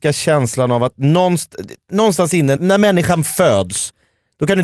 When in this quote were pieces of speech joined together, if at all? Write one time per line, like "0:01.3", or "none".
0:02.6